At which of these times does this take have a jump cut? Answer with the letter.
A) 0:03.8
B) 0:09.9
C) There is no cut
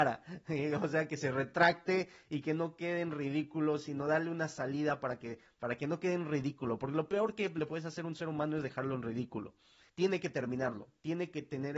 B